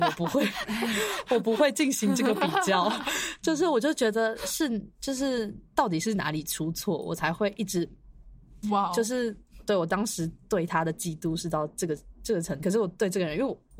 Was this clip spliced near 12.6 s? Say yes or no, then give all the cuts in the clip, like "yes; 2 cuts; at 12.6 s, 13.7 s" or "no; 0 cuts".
yes; 2 cuts; at 8.6 s, 12.6 s